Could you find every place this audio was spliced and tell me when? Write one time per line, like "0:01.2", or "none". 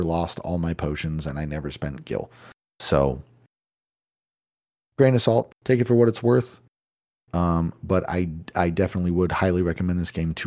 0:05.5